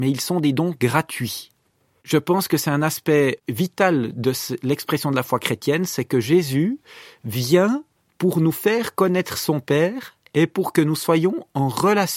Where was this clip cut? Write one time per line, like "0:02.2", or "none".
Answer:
0:02.0